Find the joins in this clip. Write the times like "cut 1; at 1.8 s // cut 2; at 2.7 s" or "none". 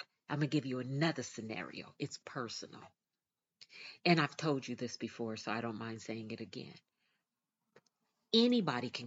none